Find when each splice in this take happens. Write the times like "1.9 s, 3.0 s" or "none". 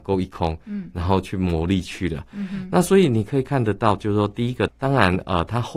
4.7 s

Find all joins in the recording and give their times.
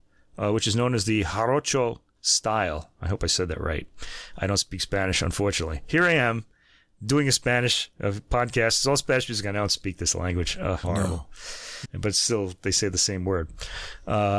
10.8 s, 11.8 s

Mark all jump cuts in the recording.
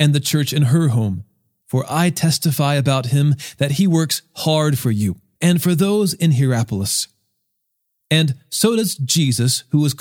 1.6 s, 5.3 s, 8.0 s

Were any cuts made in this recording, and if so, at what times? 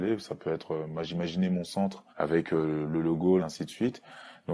2.1 s, 3.4 s

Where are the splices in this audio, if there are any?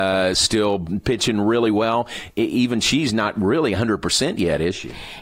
none

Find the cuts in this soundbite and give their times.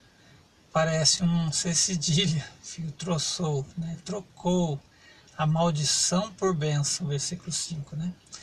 none

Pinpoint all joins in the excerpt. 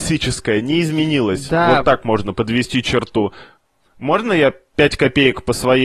none

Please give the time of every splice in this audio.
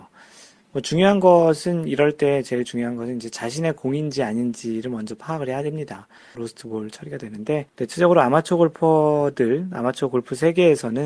6.3 s, 7.7 s

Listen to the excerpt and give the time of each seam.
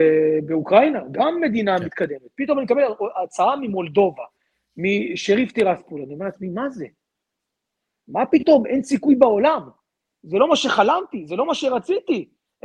none

